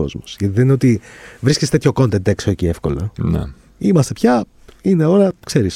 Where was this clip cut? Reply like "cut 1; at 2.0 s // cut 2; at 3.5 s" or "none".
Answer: none